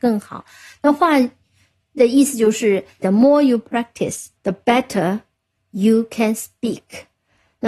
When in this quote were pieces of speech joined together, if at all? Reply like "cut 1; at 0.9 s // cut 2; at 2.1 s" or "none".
cut 1; at 3.0 s // cut 2; at 4.4 s